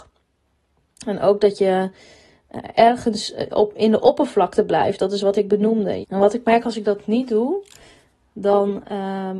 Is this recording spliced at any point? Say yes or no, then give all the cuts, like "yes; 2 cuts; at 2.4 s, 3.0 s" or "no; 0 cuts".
yes; 1 cut; at 6.0 s